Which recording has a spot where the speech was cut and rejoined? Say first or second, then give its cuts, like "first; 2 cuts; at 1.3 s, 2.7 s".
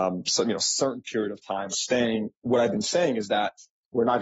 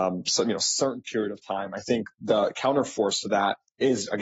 first; 1 cut; at 1.7 s